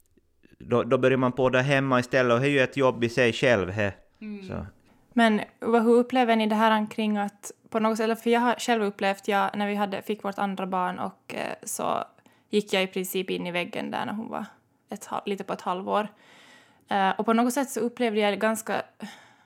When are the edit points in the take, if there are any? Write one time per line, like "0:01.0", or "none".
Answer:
none